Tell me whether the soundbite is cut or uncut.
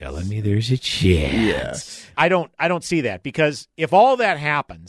cut